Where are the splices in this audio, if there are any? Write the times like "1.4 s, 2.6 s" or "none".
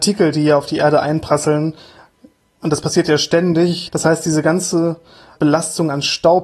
3.9 s, 5.4 s